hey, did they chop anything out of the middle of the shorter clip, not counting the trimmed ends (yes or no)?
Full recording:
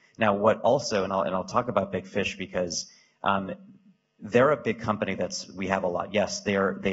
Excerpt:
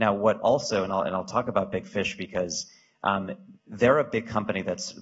yes